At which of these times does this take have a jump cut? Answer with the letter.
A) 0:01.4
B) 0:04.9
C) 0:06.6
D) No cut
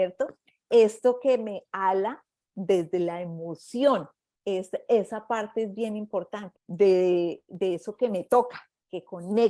C